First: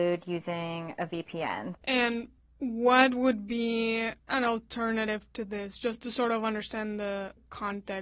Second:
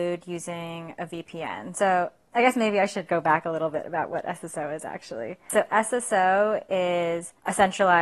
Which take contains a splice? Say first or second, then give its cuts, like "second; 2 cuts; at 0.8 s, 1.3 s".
first; 1 cut; at 1.7 s